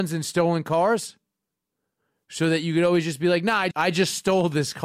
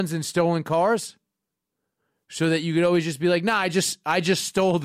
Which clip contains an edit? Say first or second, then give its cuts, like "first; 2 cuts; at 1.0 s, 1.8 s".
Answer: first; 1 cut; at 3.7 s